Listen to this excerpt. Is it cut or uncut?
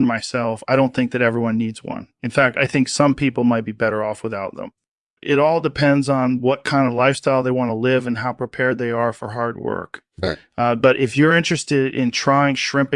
uncut